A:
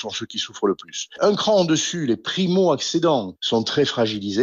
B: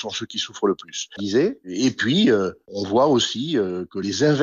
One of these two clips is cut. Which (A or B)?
B